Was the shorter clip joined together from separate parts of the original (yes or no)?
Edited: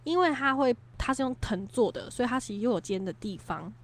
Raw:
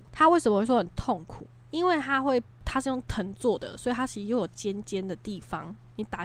yes